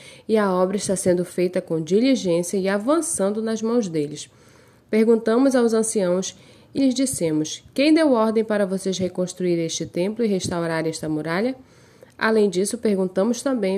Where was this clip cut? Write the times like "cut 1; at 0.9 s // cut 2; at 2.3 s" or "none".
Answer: cut 1; at 6.8 s